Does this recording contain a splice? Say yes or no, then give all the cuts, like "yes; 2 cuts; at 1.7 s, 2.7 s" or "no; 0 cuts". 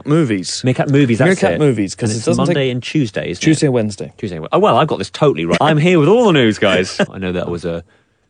yes; 2 cuts; at 5.6 s, 7.1 s